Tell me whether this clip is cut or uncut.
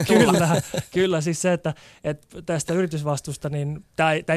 uncut